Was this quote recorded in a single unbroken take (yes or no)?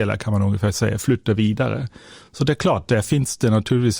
yes